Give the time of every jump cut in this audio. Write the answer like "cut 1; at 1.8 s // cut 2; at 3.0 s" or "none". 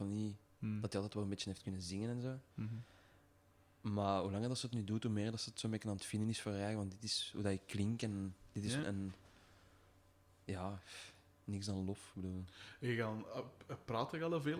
cut 1; at 8.8 s